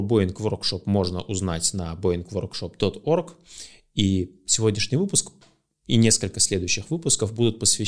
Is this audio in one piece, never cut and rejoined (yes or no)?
yes